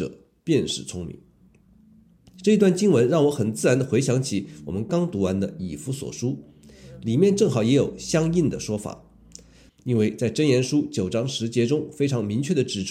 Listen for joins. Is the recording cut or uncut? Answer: cut